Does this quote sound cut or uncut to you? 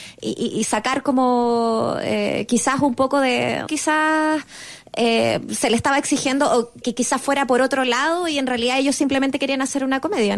cut